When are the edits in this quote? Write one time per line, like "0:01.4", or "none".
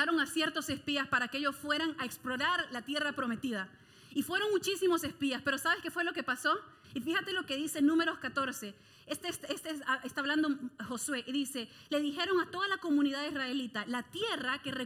0:06.8